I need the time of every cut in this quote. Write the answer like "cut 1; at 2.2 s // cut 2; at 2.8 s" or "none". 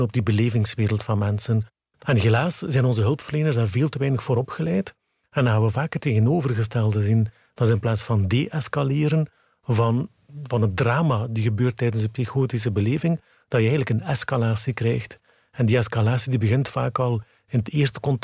cut 1; at 1.9 s

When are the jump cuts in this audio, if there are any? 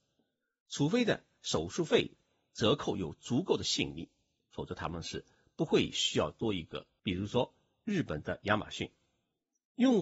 cut 1; at 7.0 s

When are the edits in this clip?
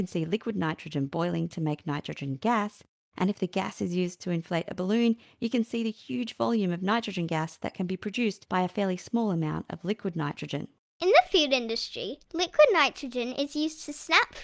cut 1; at 12.2 s

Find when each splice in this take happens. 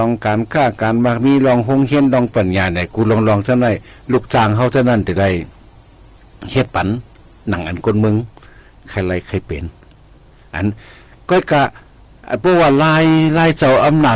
cut 1; at 2.3 s

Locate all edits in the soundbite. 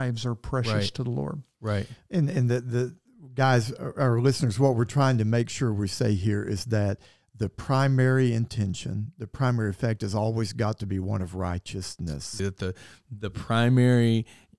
cut 1; at 12.4 s

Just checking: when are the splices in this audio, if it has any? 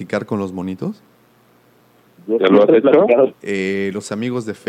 cut 1; at 3.3 s

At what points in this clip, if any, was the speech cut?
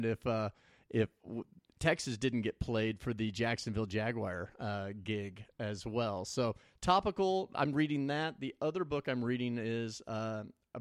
none

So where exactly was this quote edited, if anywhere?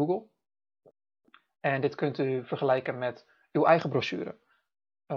none

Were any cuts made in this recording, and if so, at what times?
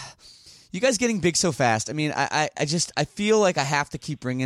none

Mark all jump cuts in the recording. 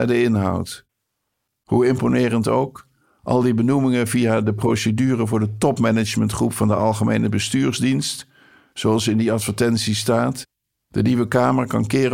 cut 1; at 1.5 s

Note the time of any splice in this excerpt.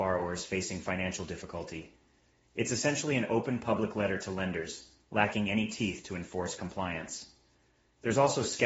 none

